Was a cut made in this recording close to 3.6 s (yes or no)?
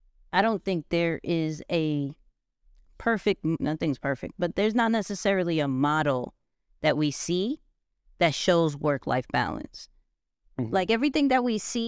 yes